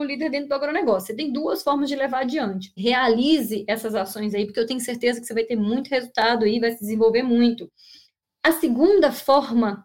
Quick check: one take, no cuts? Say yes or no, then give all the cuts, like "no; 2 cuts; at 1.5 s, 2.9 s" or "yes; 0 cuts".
no; 1 cut; at 2.8 s